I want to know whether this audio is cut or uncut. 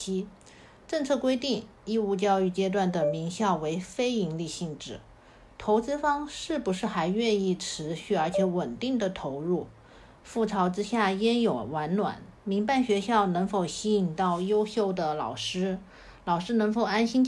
uncut